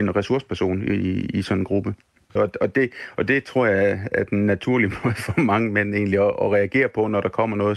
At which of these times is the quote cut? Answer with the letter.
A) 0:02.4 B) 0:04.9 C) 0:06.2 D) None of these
A